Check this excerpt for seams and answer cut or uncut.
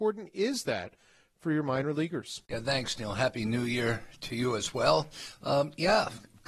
uncut